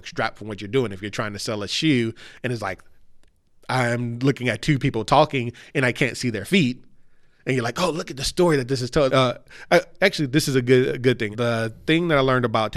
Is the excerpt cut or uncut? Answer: cut